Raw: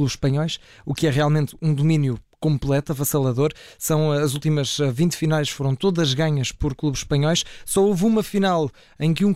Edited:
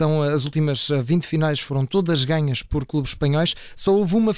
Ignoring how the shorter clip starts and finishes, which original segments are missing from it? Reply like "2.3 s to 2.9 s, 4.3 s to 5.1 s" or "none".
none